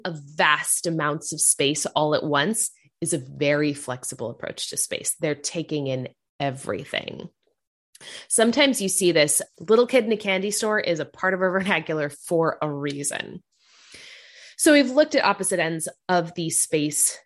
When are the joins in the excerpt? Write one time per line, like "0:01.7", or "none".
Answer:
0:09.5